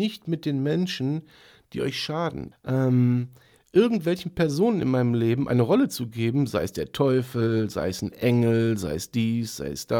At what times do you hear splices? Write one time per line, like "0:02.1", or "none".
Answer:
0:02.5